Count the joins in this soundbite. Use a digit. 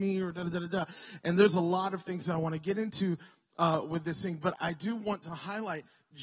1